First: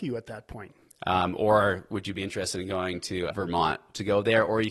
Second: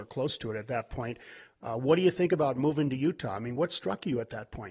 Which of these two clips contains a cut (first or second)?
first